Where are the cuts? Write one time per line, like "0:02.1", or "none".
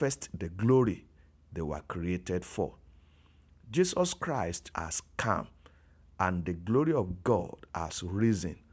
0:04.7